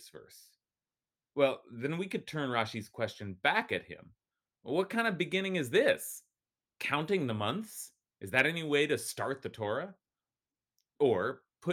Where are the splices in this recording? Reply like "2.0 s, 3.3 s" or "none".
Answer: none